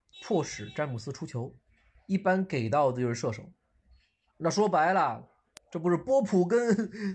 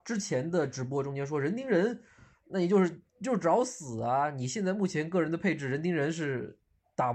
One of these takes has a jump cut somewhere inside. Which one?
first; 2 cuts; at 1.9 s, 4.3 s

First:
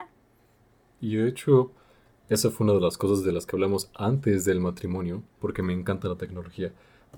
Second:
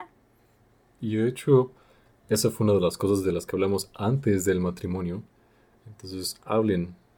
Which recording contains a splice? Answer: first; 1 cut; at 5.4 s

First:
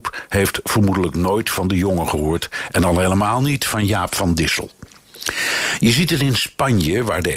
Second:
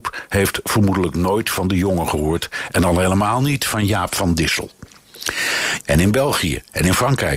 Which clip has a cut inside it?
second; 1 cut; at 5.8 s

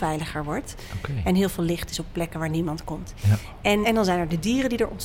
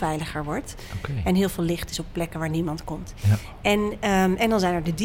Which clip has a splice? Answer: first; 1 cut; at 3.8 s

